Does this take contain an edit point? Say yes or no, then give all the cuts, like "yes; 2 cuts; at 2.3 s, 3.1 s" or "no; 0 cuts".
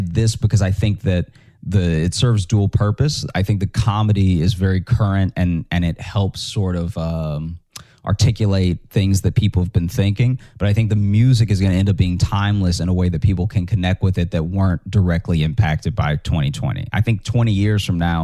no; 0 cuts